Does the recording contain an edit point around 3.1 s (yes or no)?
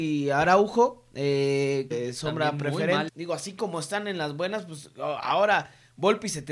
yes